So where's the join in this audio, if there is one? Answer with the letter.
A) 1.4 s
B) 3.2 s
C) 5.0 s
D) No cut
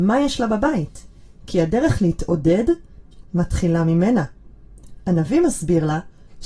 B